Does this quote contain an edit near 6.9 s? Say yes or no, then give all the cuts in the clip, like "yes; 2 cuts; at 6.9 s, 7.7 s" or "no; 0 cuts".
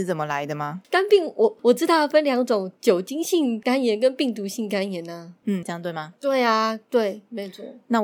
no; 1 cut; at 5.6 s